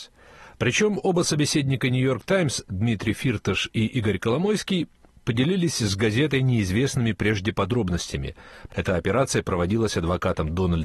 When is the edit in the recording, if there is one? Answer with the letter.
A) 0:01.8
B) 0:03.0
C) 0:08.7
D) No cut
C